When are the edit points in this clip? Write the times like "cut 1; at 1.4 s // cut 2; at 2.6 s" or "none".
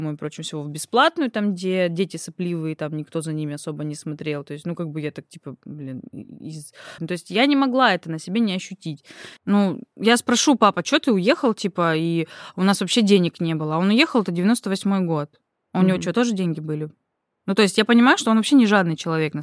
cut 1; at 7.0 s // cut 2; at 9.4 s